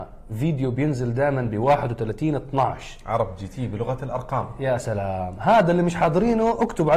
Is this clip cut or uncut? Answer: uncut